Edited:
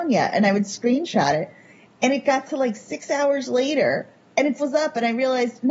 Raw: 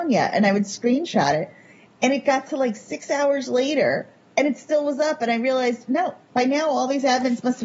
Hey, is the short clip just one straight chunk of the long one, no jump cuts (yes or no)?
no